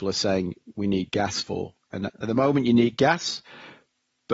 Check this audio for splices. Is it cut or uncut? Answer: uncut